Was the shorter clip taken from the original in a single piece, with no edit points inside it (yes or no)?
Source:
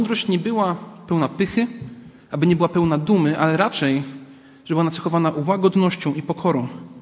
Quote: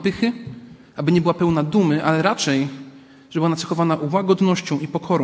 yes